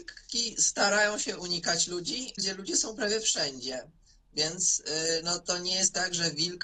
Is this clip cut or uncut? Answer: cut